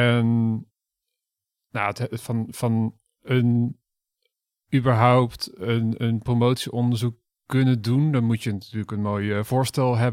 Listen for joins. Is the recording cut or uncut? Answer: uncut